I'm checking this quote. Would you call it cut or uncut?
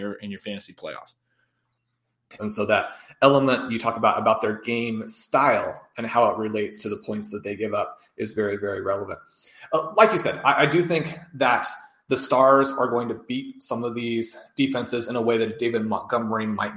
cut